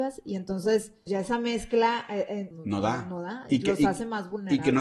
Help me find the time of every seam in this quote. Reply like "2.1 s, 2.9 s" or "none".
1.1 s, 2.5 s

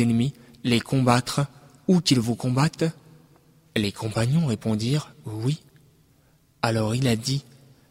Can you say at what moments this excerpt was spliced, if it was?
none

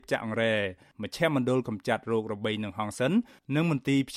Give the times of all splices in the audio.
none

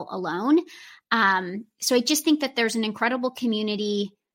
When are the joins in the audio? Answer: none

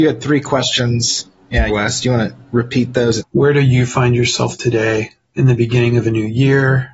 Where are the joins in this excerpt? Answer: 1.7 s, 3.2 s, 5.2 s

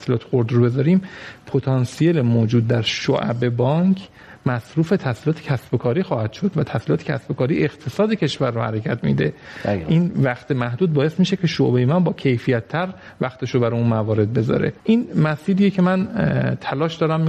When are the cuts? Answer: 14.8 s

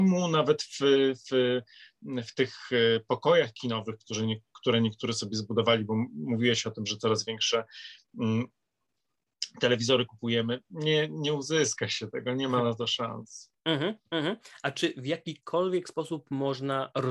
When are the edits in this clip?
none

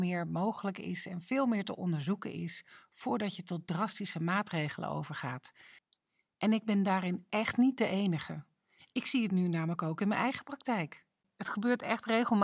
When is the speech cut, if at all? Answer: none

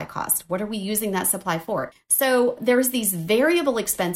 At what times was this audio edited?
1.9 s

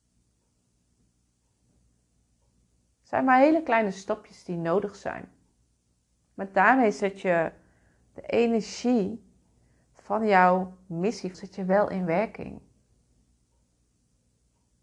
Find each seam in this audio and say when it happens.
11.3 s

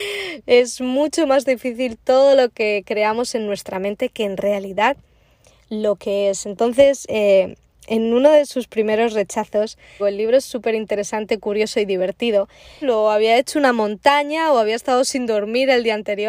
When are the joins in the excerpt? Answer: 10.0 s, 12.8 s

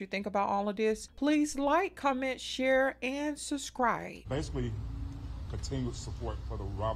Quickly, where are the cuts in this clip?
4.2 s, 5.5 s

